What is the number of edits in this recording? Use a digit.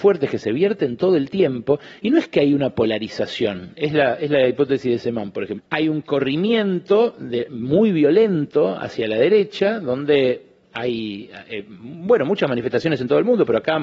1